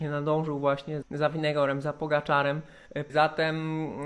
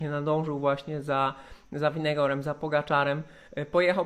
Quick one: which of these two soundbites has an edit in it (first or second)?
first